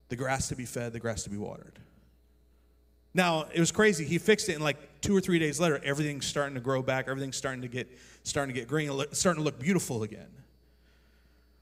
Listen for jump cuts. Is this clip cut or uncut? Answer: uncut